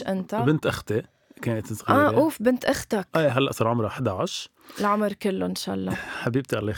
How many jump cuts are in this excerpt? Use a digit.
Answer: 0